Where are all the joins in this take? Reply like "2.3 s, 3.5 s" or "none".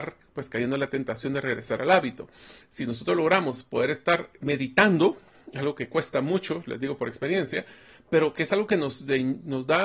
2.6 s